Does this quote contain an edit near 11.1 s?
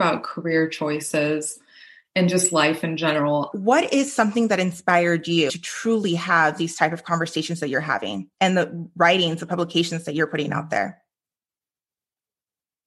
no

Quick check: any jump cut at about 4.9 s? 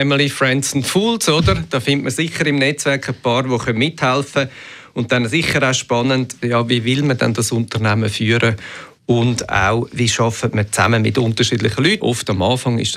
no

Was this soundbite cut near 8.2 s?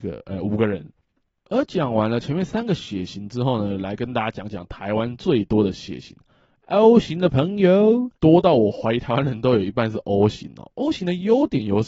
yes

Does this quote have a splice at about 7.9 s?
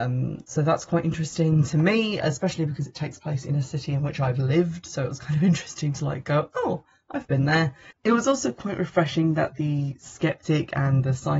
no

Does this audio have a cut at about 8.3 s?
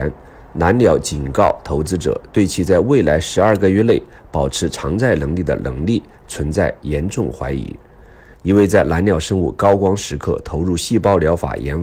yes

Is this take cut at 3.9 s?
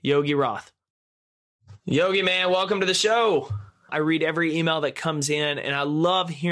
yes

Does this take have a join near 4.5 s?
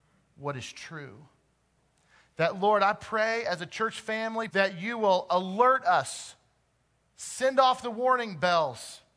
yes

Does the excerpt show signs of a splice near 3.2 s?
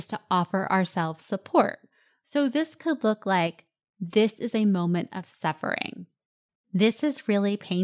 no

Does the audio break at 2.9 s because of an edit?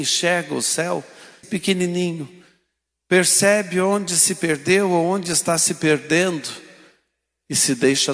no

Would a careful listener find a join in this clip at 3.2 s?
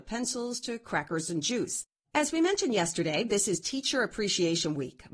no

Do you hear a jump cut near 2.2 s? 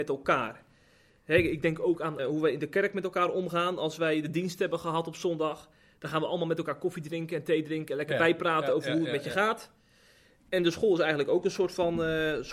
yes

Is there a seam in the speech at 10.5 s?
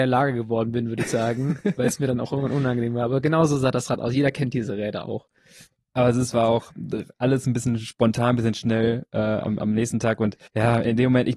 yes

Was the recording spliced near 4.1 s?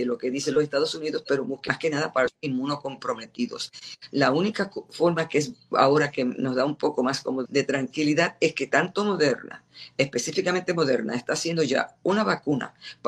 no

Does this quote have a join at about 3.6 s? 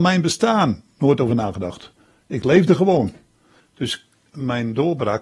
yes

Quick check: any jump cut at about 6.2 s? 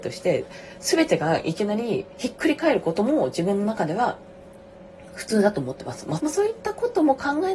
yes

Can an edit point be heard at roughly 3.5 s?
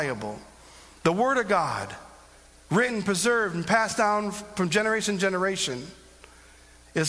no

